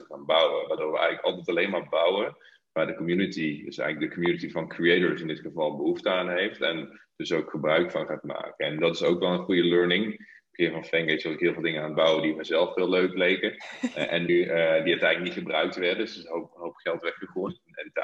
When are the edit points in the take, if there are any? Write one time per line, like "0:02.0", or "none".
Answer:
0:14.3